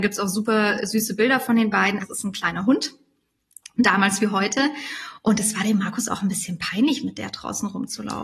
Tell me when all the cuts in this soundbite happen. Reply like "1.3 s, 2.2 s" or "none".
2.0 s

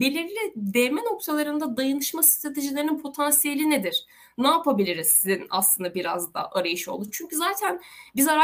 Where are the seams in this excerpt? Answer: none

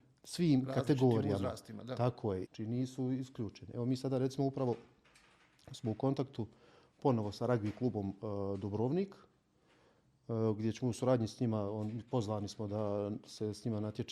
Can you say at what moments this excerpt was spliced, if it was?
2.5 s

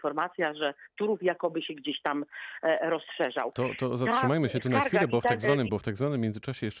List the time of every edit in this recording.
5.7 s

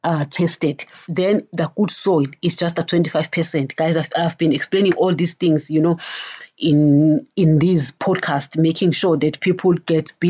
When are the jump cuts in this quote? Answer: 1.0 s

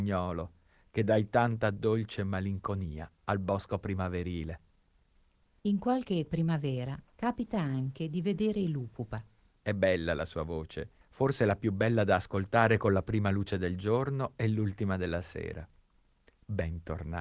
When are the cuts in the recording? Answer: 7.1 s, 9.6 s, 11.0 s

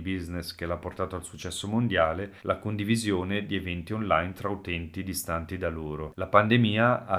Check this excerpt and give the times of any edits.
2.4 s, 6.1 s

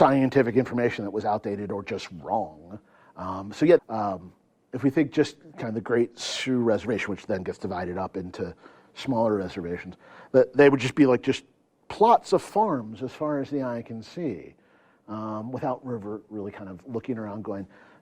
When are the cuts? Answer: 3.8 s

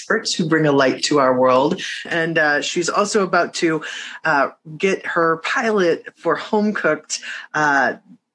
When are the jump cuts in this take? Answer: 2.1 s

